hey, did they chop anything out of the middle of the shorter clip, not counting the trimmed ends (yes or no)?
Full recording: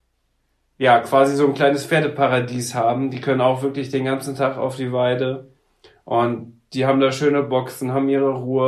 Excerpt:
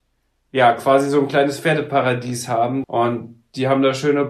yes